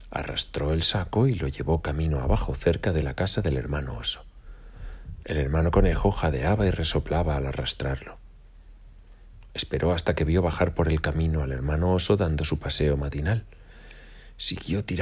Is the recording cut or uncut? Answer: cut